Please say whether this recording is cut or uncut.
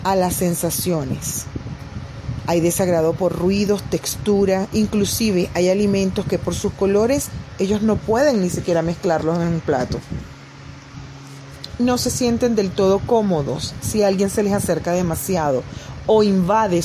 uncut